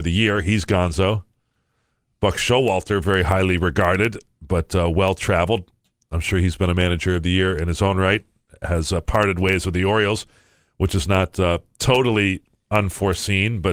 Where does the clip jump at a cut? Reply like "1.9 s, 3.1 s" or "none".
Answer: none